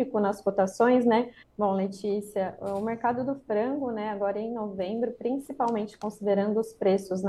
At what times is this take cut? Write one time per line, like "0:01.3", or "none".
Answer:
0:01.4